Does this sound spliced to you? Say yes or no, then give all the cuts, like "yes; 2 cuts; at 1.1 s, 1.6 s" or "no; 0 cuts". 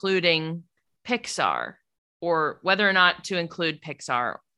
no; 0 cuts